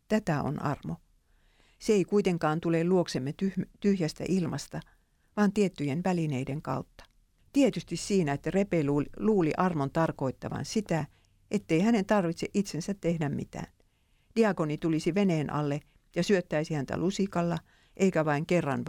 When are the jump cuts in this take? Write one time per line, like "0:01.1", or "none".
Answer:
0:07.4